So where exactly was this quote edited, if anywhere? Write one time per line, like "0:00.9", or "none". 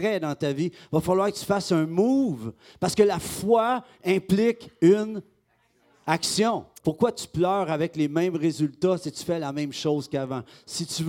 0:06.8

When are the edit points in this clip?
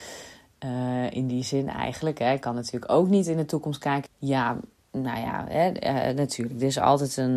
0:04.1

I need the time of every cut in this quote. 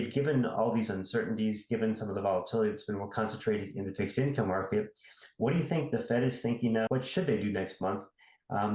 0:06.9

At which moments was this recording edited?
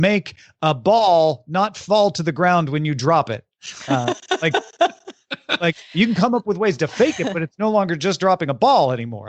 none

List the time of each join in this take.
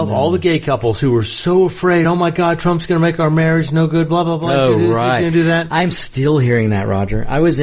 none

